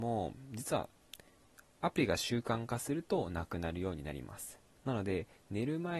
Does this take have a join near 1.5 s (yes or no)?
no